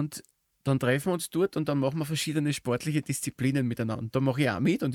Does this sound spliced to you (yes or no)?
no